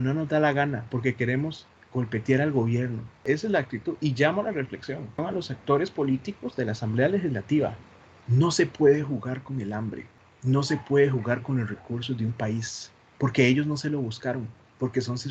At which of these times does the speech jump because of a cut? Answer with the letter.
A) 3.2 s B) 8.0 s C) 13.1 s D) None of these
C